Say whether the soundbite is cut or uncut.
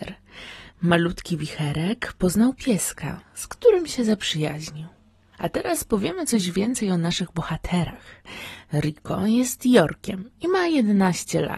cut